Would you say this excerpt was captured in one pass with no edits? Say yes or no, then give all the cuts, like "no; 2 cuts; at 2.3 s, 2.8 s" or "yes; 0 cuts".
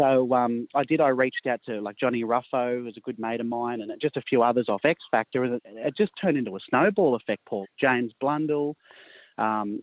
no; 2 cuts; at 5.6 s, 7.6 s